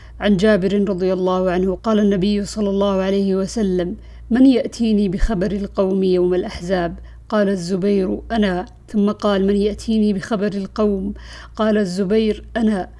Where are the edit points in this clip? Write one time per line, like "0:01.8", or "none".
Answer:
0:01.8